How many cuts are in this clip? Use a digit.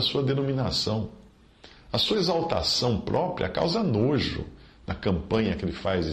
0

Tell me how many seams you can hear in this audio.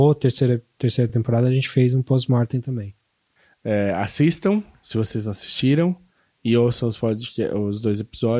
0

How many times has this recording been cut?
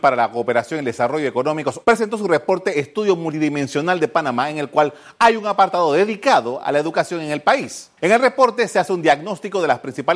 2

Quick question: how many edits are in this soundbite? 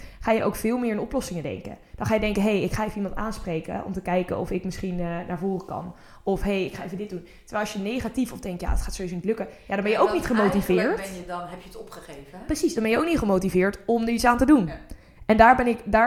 0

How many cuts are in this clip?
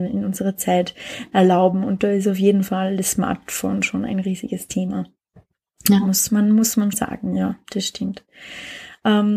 1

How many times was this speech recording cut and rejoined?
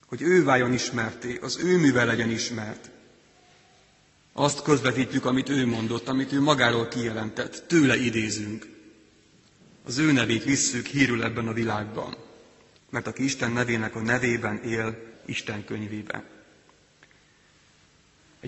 2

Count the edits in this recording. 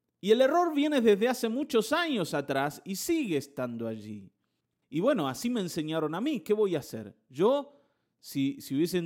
1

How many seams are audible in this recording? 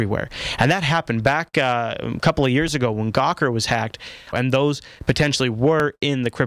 1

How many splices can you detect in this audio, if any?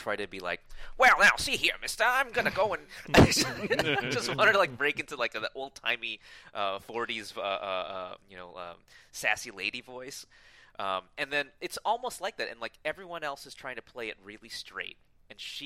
0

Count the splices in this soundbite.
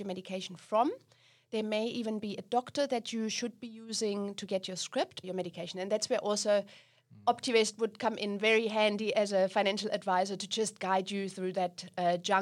1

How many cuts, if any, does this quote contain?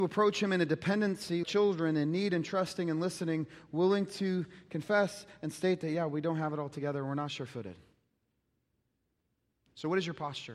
1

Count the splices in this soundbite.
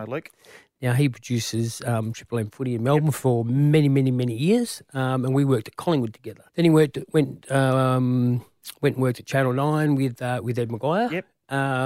1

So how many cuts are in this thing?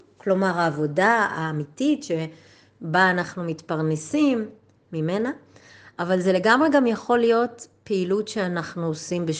0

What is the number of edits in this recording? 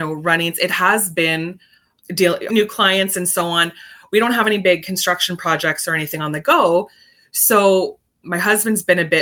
1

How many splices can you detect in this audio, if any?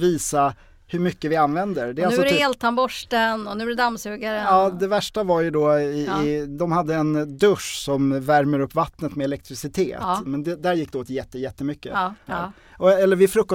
2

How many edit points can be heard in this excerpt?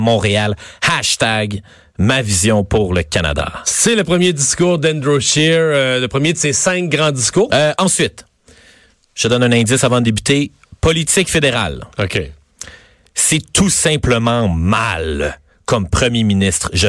1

